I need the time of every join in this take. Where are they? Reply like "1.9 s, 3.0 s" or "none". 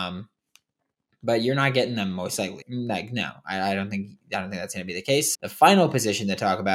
2.6 s, 5.3 s